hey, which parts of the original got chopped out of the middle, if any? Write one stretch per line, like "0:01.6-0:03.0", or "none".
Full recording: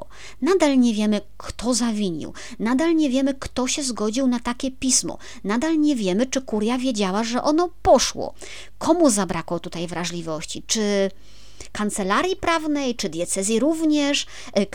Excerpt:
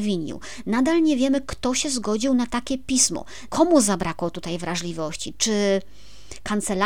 0:05.4-0:08.8